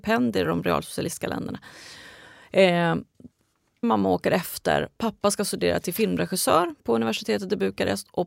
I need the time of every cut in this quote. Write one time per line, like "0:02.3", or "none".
0:03.8